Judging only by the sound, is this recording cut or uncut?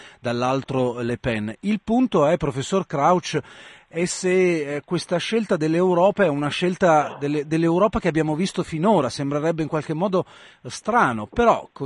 uncut